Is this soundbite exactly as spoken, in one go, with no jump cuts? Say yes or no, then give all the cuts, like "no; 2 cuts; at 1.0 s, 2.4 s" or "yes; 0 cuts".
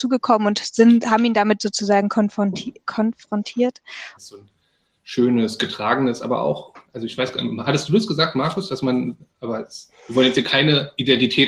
no; 1 cut; at 4.2 s